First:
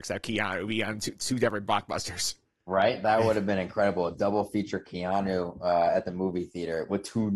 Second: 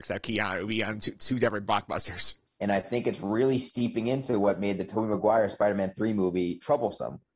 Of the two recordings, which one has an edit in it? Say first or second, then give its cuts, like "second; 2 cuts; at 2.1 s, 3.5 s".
second; 1 cut; at 2.5 s